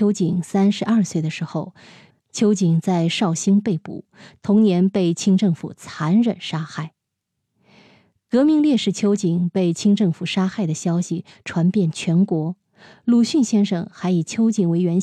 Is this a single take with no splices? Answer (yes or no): no